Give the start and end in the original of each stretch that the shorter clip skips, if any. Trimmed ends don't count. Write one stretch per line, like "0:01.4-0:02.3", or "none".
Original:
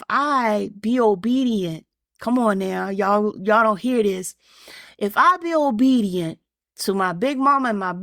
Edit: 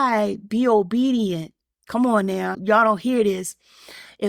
0:02.9-0:03.3